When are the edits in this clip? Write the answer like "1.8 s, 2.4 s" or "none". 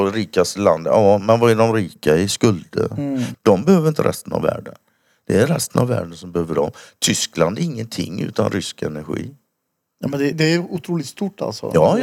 3.3 s, 10.3 s

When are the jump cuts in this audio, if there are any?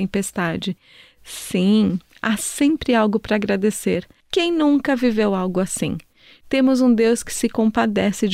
4.2 s, 6.4 s

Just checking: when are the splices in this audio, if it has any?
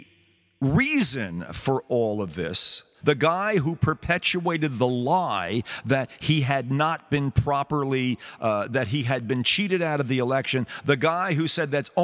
3.0 s

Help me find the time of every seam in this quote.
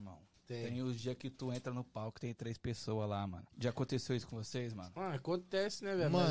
3.5 s

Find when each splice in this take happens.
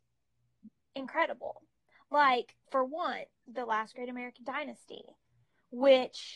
2.6 s

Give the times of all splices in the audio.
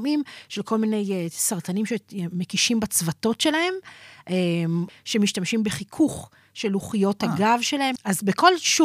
4.9 s, 8.0 s

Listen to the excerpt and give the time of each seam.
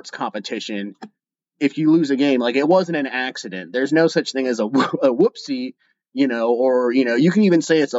none

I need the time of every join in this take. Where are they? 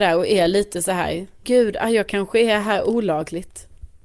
1.4 s

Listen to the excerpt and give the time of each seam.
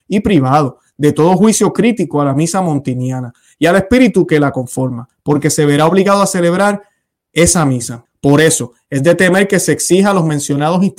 8.0 s

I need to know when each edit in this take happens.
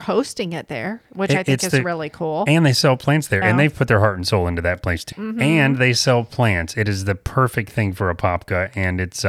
3.4 s, 5.1 s

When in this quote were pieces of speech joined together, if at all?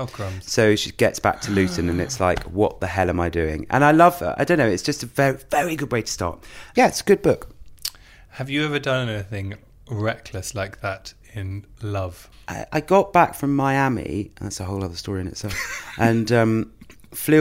none

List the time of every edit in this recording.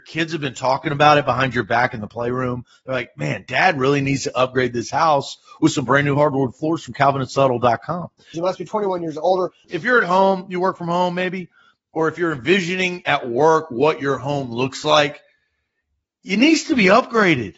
8.3 s, 9.6 s

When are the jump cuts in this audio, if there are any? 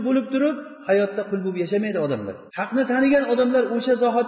2.5 s

